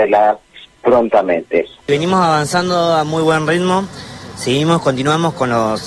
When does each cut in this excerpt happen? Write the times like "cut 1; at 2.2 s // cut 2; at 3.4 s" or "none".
cut 1; at 1.8 s